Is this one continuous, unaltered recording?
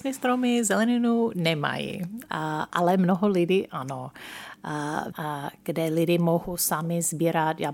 no; 1 cut; at 5.1 s

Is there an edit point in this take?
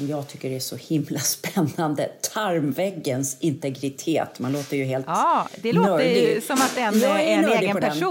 no; 0 cuts

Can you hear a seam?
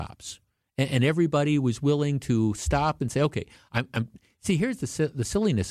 no; 0 cuts

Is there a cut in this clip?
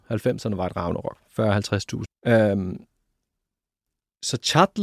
yes; 1 cut; at 2.0 s

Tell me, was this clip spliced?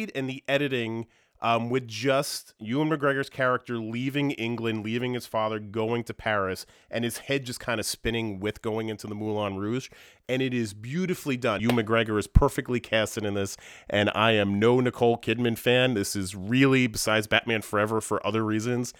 yes; 1 cut; at 11.6 s

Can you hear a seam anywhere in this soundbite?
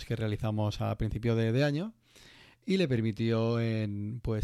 no; 0 cuts

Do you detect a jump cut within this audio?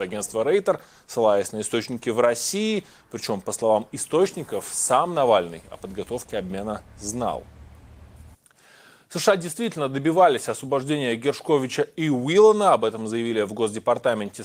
no; 0 cuts

